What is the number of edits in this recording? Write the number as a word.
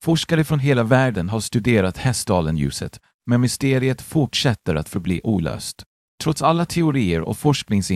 one